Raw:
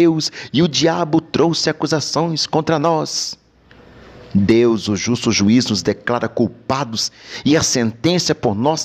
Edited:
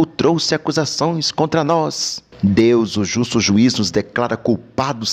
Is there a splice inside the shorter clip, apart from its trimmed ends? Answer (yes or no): yes